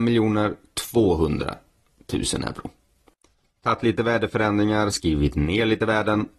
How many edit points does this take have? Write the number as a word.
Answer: one